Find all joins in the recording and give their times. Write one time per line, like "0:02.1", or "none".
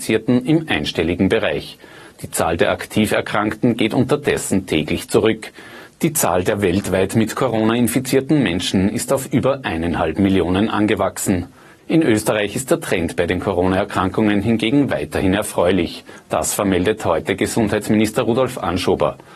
0:06.0
0:11.8